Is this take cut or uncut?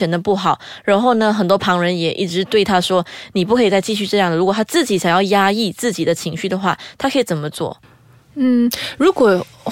uncut